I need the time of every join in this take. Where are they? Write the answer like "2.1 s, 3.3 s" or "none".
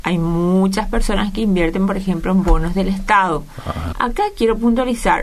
3.9 s